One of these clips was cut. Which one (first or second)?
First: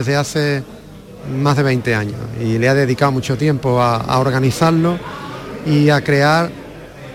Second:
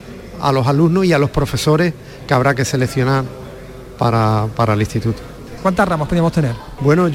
second